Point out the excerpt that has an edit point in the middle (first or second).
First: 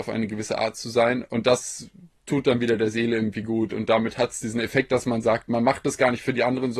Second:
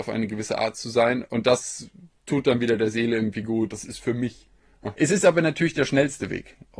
second